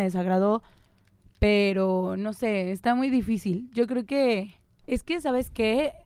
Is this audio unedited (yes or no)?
no